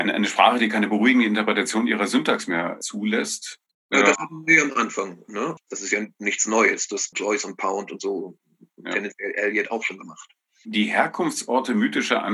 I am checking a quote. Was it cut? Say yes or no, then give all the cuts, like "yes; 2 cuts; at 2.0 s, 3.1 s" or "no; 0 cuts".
yes; 2 cuts; at 5.6 s, 7.1 s